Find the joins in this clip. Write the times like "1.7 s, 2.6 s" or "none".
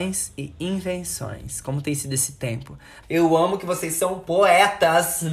3.0 s